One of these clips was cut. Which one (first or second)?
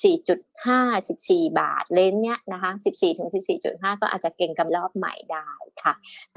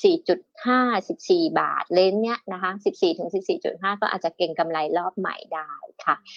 first